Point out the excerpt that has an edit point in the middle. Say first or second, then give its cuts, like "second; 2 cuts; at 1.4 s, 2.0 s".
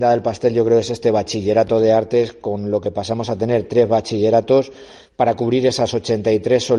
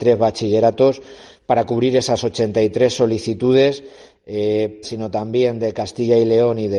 second; 1 cut; at 4.8 s